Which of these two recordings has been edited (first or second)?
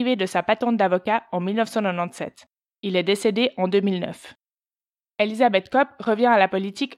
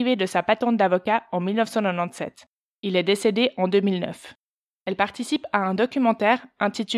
second